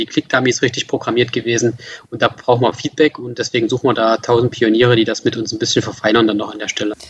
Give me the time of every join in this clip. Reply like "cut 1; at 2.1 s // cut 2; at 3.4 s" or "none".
none